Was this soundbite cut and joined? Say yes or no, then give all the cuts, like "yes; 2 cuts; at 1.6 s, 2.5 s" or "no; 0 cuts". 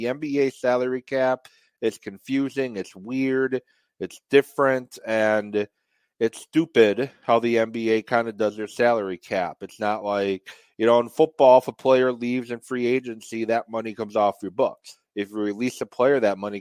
no; 0 cuts